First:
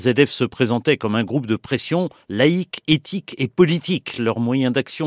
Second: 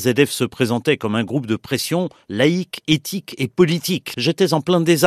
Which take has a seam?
second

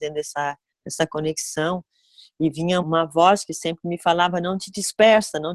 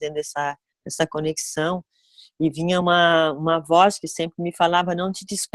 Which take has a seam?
first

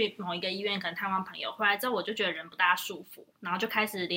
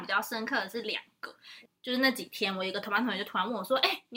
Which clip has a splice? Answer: second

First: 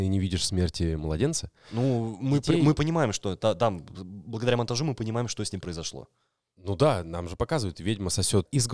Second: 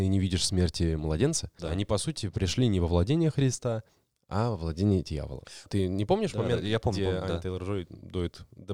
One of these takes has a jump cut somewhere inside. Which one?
second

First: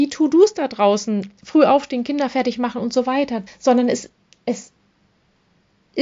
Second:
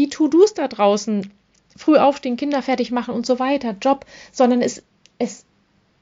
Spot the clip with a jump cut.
first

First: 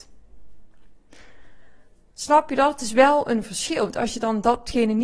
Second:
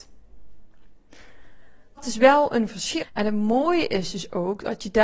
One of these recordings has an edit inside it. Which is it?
second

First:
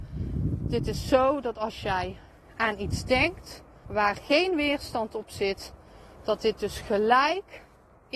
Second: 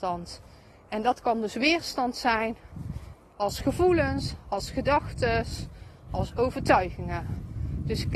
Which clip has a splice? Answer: first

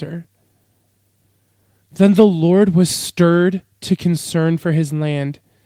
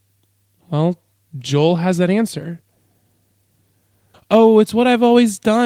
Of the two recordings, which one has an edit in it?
second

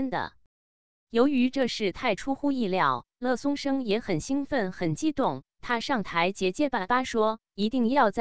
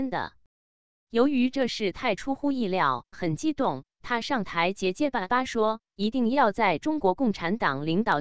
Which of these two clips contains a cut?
second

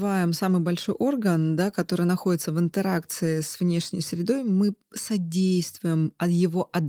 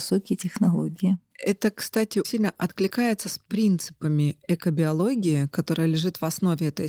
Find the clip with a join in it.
second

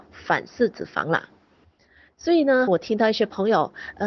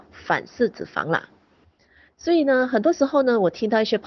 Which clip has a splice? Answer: first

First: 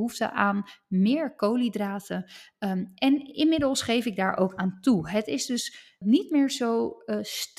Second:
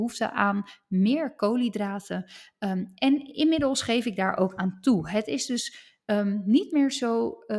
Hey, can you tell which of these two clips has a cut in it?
first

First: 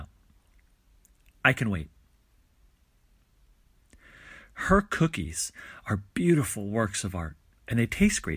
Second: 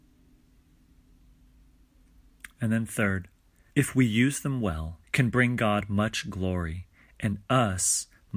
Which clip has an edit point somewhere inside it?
second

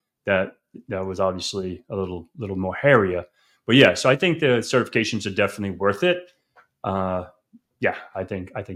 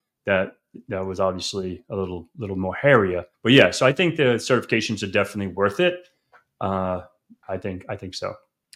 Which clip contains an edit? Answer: second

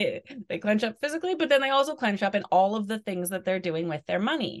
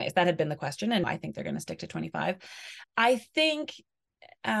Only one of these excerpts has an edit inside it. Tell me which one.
second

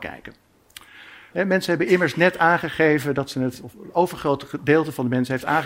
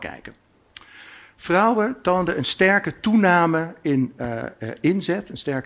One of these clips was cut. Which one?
first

